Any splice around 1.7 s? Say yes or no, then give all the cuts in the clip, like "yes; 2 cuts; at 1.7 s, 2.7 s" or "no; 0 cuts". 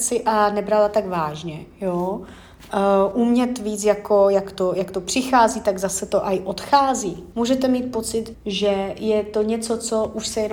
no; 2 cuts; at 7.3 s, 8.3 s